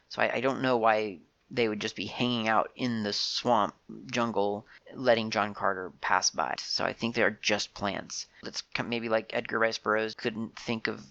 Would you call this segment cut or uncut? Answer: cut